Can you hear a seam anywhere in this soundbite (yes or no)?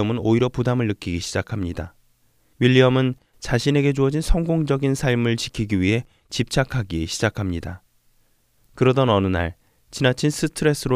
yes